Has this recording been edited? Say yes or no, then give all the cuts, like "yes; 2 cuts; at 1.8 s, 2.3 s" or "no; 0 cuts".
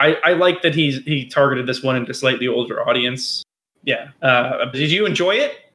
yes; 2 cuts; at 3.7 s, 4.7 s